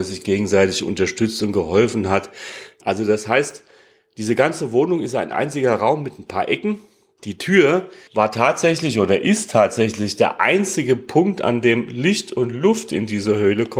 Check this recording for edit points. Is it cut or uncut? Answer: cut